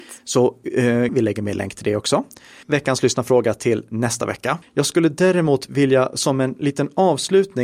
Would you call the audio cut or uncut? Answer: cut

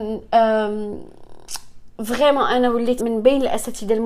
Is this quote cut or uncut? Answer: cut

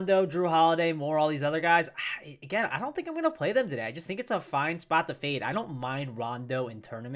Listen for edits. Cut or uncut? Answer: uncut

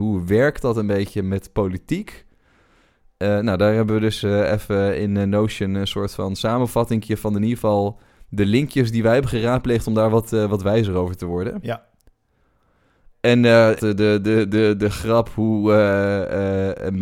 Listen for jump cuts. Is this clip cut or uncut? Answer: cut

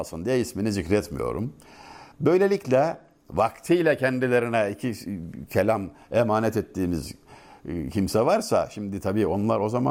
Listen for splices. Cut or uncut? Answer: uncut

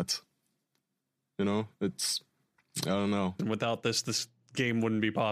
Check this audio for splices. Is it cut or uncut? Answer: cut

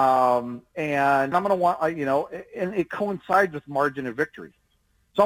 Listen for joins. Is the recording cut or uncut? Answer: cut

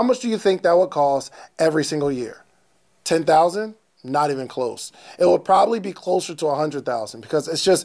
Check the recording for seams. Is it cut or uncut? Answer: uncut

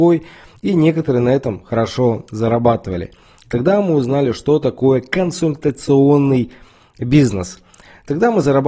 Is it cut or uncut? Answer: uncut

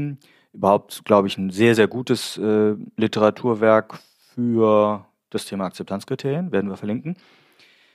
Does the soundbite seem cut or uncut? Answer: uncut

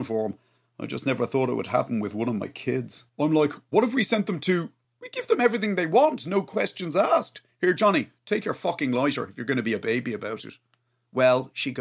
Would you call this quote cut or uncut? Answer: cut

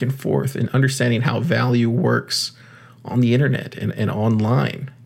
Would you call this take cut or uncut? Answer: uncut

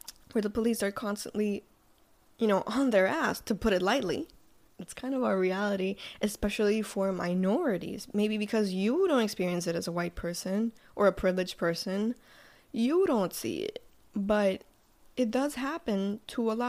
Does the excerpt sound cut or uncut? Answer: cut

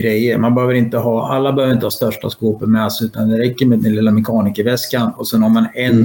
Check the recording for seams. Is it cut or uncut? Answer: uncut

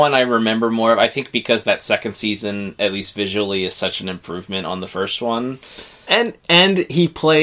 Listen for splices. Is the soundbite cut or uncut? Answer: uncut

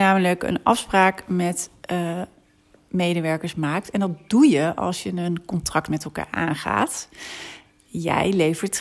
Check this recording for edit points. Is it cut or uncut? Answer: uncut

